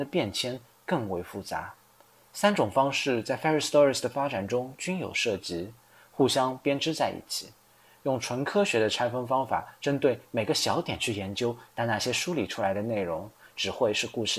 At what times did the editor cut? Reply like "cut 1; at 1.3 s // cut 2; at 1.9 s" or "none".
cut 1; at 11.7 s